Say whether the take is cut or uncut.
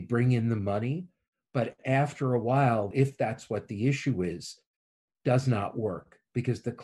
cut